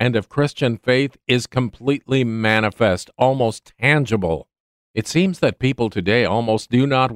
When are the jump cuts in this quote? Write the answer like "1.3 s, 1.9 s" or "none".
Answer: 4.7 s